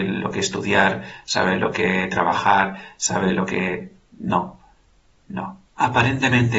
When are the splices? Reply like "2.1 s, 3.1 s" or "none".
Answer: 5.7 s